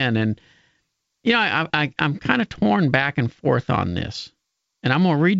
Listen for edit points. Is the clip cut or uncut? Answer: cut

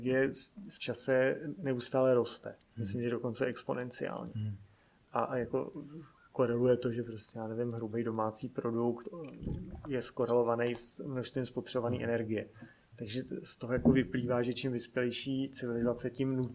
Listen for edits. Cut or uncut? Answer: uncut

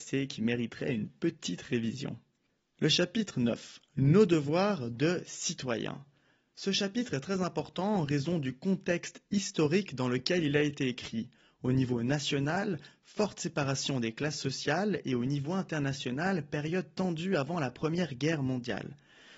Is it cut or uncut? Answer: uncut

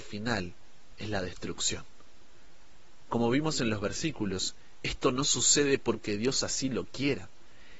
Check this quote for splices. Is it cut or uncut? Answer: uncut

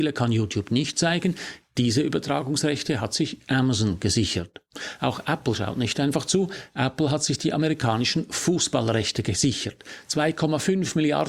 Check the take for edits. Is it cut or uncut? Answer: uncut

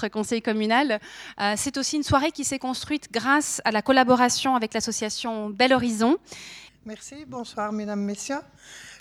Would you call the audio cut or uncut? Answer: cut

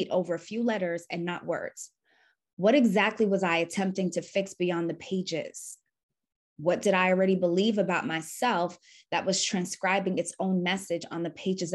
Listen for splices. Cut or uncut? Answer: uncut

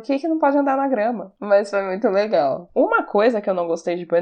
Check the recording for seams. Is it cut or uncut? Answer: uncut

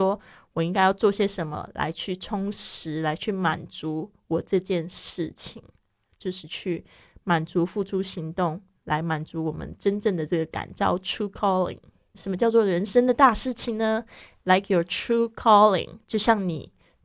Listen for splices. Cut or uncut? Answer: cut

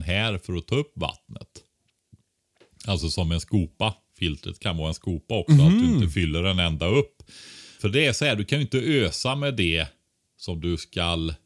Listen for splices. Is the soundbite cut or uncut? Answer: cut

